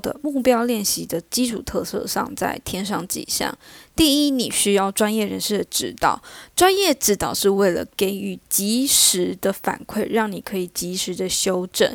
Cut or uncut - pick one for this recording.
uncut